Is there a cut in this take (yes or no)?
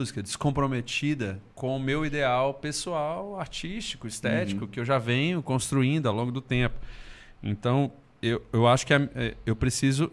yes